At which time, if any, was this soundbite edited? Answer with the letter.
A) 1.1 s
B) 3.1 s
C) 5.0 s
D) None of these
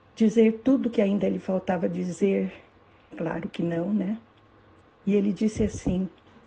B